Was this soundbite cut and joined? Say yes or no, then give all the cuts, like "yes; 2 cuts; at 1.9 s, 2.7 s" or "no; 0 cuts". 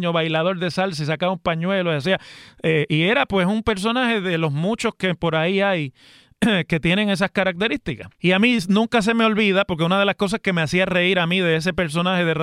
yes; 1 cut; at 8.1 s